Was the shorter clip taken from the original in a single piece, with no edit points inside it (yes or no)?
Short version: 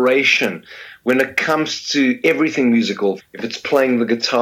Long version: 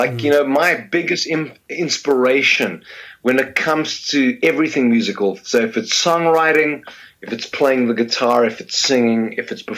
no